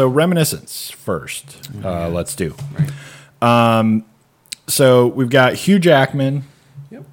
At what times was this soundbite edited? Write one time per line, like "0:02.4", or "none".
none